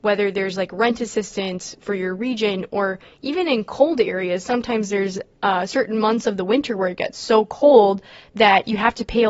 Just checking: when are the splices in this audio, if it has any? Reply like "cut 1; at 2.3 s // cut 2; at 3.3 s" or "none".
none